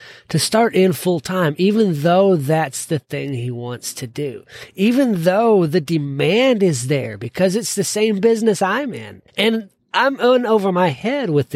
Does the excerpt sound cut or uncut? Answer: cut